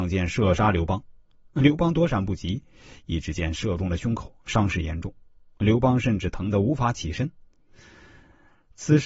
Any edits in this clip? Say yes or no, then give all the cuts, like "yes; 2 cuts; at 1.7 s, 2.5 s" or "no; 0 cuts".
no; 0 cuts